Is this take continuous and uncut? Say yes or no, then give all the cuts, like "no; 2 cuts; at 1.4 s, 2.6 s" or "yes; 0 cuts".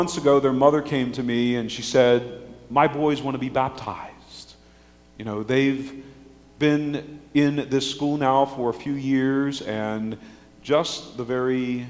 yes; 0 cuts